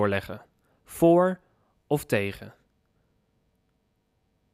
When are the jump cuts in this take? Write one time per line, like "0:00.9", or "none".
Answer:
none